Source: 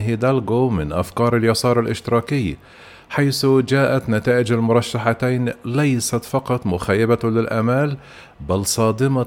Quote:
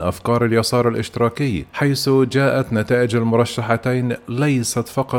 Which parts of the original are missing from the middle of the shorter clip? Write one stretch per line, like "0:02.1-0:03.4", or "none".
0:02.6-0:03.1